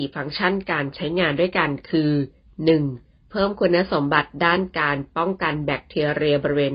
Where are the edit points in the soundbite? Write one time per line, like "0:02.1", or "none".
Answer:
0:03.3